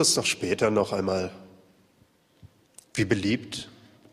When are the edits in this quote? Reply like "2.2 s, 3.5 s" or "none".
2.9 s